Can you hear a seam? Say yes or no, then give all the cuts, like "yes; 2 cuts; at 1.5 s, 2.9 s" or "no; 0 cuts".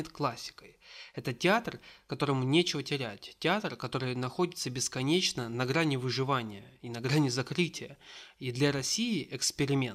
no; 0 cuts